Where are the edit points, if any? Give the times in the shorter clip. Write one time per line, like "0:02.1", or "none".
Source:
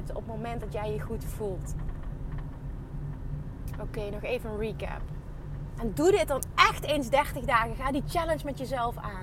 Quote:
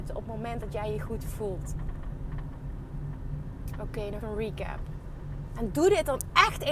0:04.2